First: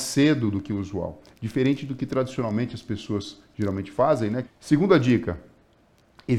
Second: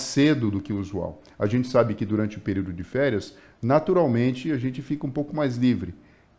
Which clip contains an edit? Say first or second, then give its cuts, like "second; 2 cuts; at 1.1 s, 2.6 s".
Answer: first; 2 cuts; at 1.3 s, 4.4 s